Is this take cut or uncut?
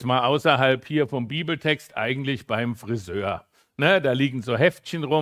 uncut